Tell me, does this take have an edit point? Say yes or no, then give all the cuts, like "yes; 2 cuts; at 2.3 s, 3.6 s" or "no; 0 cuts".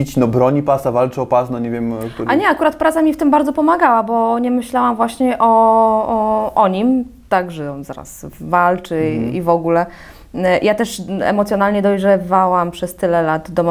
no; 0 cuts